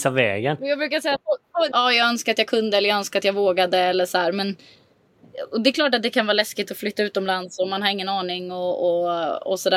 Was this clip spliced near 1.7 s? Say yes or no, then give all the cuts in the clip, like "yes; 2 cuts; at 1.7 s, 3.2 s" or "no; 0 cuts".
yes; 1 cut; at 1.7 s